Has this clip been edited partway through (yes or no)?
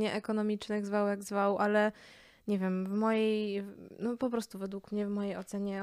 no